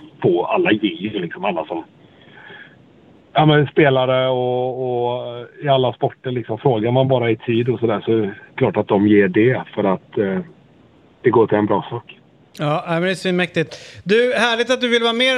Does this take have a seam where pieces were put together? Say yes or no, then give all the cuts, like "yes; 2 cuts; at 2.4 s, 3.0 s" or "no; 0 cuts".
no; 0 cuts